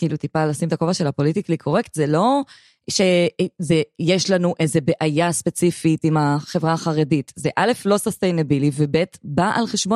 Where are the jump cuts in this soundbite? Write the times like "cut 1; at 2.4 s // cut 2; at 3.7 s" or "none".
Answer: none